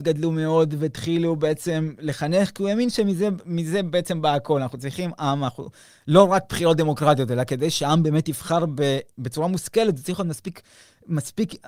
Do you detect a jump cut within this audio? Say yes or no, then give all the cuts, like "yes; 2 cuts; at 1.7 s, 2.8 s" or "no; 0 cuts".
no; 0 cuts